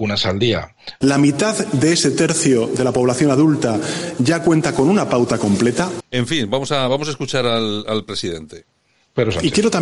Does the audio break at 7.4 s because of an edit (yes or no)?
no